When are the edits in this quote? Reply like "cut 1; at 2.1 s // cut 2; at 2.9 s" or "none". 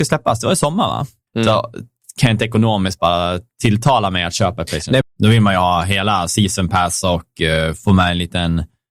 cut 1; at 1.3 s // cut 2; at 5.0 s